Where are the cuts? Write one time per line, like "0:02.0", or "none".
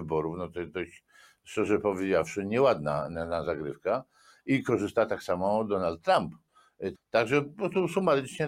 0:06.9

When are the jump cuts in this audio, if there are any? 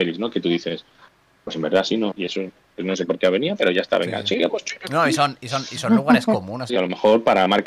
0:02.1
0:06.7

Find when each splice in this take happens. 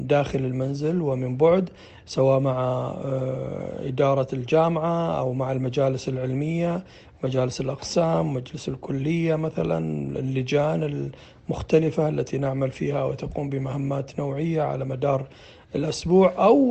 none

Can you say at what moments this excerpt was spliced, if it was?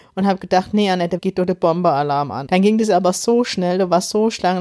0:01.2
0:02.5

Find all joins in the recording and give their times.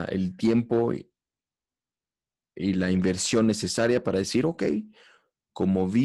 none

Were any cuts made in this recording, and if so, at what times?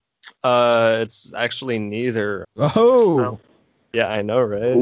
0:02.4

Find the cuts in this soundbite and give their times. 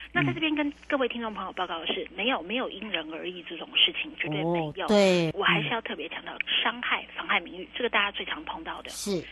0:05.3
0:06.4

